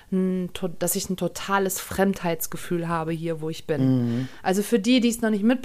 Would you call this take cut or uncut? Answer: uncut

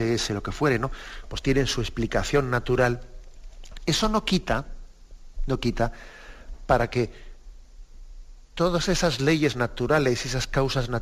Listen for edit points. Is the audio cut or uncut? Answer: uncut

